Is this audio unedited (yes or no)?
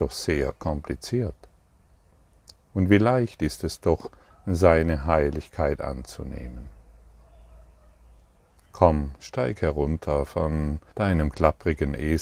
no